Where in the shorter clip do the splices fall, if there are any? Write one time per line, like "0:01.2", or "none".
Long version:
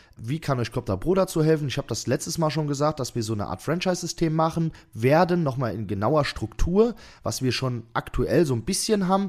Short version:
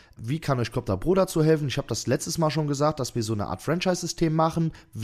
none